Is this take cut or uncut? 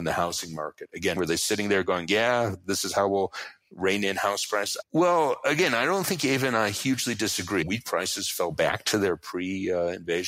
cut